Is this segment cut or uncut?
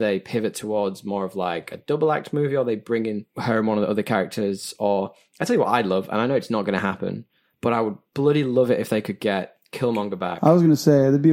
cut